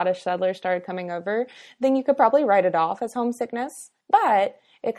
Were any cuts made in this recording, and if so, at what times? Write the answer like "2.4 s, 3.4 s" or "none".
4.0 s

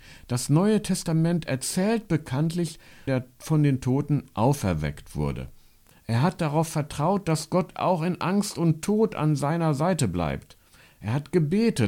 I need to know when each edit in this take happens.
3.1 s, 5.9 s

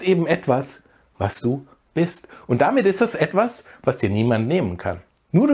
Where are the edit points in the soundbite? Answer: none

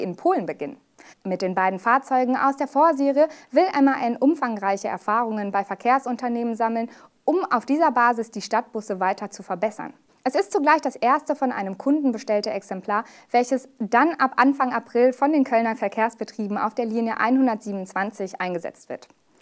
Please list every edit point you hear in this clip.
1.1 s, 10.1 s

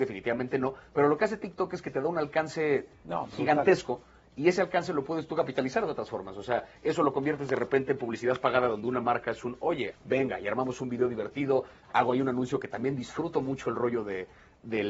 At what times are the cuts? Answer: 9.9 s

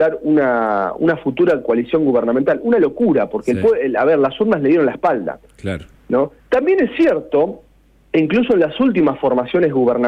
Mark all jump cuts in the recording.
6.4 s

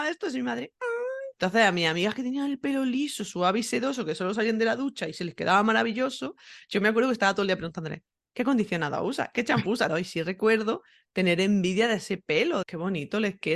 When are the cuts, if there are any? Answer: 1.3 s, 9.9 s, 12.6 s

